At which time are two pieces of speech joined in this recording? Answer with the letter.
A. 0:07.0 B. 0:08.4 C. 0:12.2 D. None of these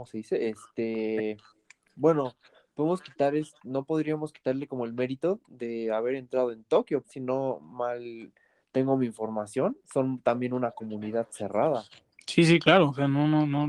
A